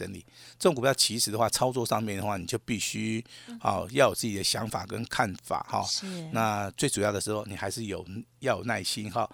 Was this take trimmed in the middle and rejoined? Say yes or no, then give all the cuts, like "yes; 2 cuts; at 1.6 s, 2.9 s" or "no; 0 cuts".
no; 0 cuts